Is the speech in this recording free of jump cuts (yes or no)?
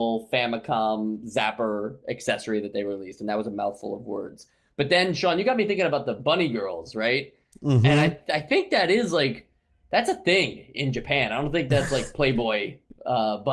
yes